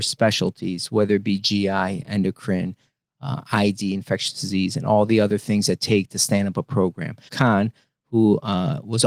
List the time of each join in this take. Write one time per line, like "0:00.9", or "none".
0:07.3

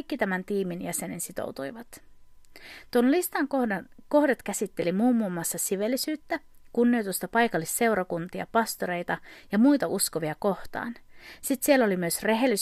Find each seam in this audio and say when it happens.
none

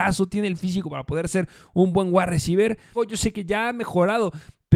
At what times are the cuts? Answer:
0:02.9

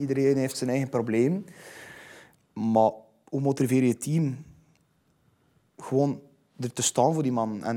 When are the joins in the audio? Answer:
0:02.4

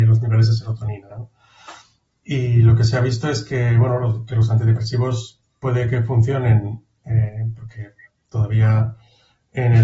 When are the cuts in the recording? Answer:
0:01.1

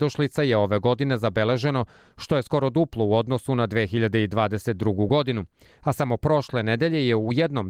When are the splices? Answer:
none

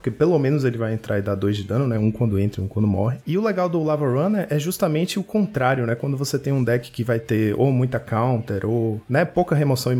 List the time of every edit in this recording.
none

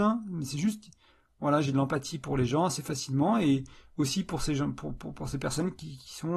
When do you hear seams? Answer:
none

